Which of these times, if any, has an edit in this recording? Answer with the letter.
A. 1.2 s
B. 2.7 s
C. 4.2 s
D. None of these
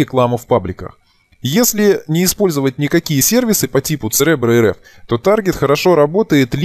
D